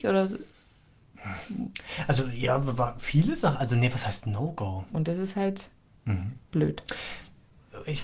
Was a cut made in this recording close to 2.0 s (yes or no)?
no